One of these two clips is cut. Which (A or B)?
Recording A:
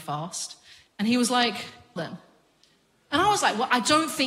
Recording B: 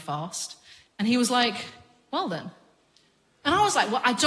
A